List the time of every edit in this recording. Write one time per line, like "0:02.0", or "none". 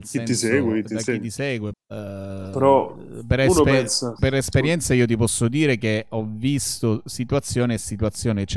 0:01.7
0:04.2